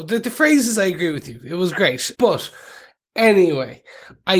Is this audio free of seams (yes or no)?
no